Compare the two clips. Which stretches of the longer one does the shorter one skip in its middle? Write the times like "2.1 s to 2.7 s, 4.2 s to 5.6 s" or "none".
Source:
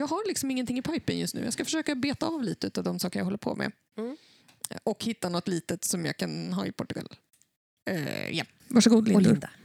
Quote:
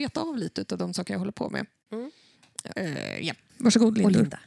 4.8 s to 7.9 s